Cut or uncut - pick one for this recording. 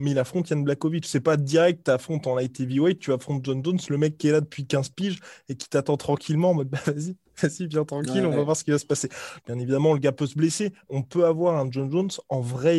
cut